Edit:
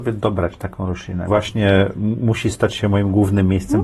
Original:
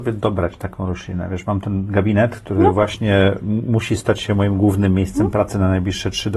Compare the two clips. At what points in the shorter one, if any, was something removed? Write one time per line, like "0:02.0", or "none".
0:01.3

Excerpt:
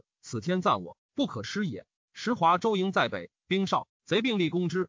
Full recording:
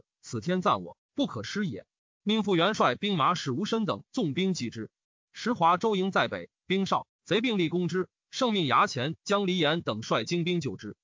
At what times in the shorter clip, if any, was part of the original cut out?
0:02.0

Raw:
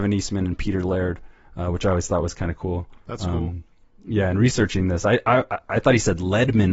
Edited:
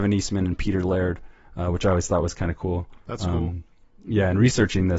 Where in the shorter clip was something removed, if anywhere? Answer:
none

